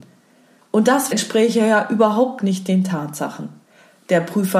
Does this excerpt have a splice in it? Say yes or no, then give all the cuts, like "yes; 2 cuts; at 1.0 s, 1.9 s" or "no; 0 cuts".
yes; 1 cut; at 1.1 s